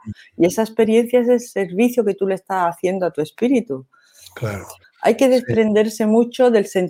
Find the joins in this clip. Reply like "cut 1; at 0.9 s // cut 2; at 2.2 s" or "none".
cut 1; at 4.8 s